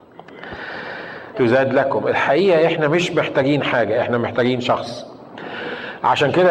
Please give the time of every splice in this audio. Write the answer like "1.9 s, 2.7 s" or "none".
1.3 s

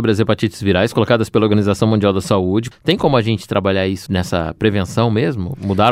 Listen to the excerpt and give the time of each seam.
2.7 s, 4.1 s

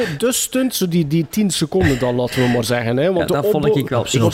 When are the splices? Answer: none

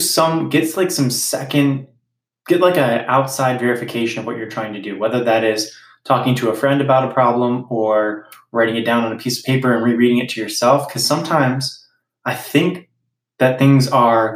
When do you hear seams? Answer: none

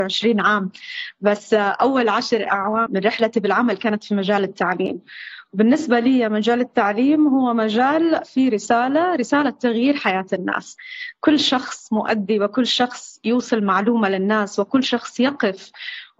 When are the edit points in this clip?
2.9 s

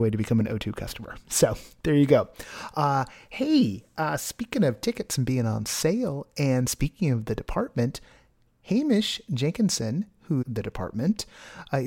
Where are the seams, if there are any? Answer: 10.4 s

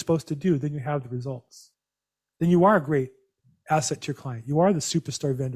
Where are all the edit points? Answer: 2.3 s

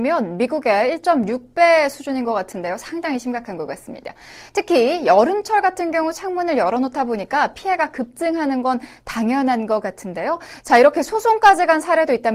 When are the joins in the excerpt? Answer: none

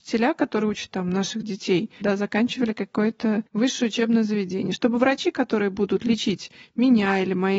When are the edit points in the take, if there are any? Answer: 2.0 s, 3.5 s

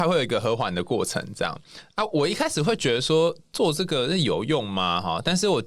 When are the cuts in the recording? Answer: none

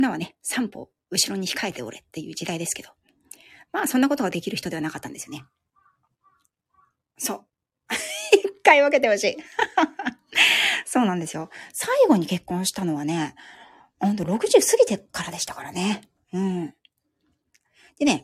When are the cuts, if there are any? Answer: none

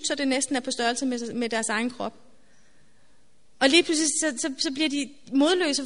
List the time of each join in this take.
1.3 s

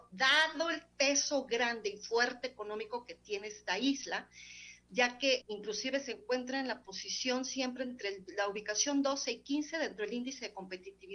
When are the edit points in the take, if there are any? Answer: 5.4 s

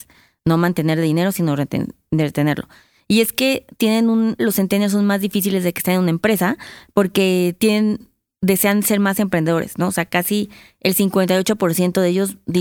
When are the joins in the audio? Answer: 4.4 s

